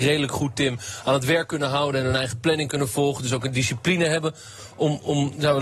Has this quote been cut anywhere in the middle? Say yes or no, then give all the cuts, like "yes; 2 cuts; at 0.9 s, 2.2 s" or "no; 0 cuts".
no; 0 cuts